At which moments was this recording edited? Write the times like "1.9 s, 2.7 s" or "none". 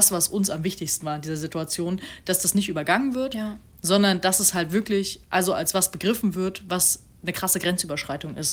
none